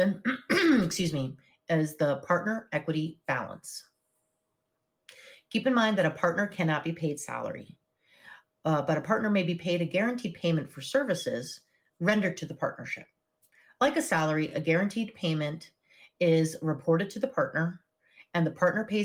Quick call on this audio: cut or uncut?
uncut